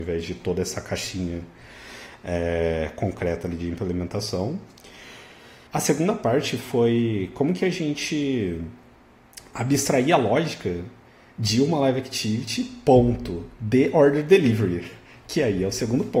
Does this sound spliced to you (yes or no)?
yes